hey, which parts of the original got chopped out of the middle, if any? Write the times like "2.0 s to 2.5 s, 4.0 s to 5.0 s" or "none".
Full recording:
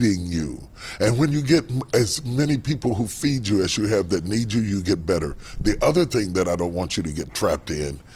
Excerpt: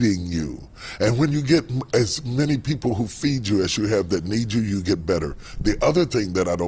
none